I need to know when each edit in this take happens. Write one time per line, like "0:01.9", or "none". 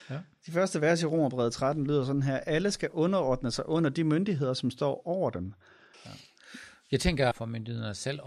0:05.9
0:07.3